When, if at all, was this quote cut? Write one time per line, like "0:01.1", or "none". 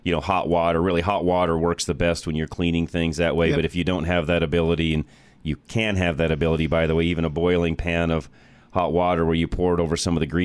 none